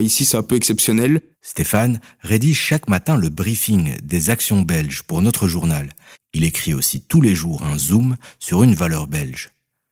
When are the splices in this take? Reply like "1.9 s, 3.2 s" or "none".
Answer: 1.3 s, 6.1 s